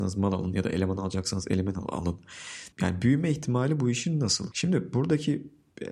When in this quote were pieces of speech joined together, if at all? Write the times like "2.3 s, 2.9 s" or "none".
2.7 s, 4.5 s